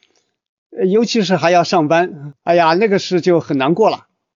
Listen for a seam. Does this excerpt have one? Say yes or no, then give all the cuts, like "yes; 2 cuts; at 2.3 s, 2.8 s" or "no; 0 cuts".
no; 0 cuts